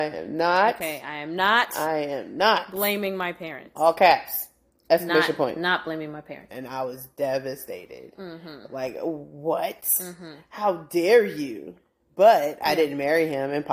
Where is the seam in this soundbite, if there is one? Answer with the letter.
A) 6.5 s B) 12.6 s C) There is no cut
A